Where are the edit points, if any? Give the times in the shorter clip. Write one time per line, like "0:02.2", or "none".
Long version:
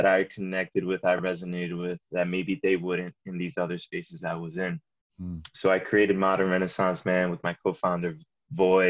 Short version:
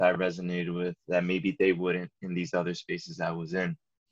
none